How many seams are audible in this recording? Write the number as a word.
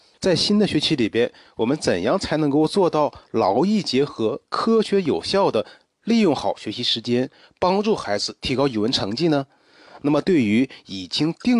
zero